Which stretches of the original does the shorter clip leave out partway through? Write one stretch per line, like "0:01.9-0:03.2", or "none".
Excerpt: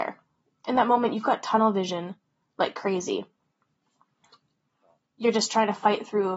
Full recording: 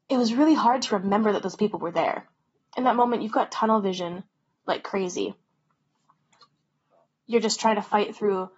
none